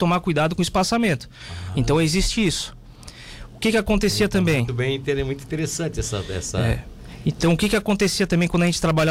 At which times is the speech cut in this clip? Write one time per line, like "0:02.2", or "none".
0:01.7
0:04.7